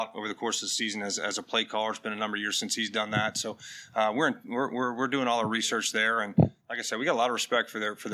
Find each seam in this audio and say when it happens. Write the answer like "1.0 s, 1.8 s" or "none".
none